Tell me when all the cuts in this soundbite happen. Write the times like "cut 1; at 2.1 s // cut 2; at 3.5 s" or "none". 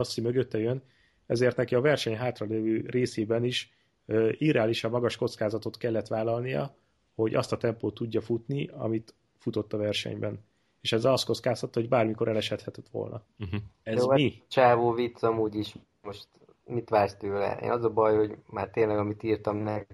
none

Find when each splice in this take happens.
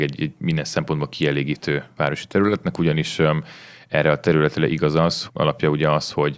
cut 1; at 5.3 s

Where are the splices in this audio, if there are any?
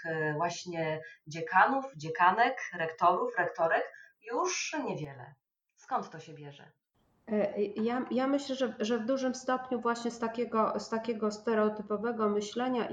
none

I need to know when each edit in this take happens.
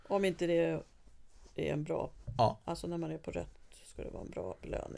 none

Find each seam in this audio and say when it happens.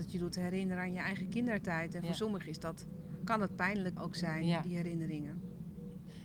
cut 1; at 4.0 s

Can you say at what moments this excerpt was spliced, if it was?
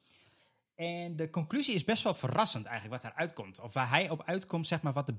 none

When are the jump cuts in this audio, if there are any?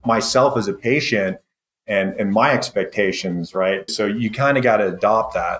cut 1; at 3.9 s

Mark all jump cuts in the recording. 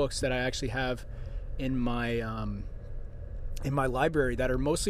none

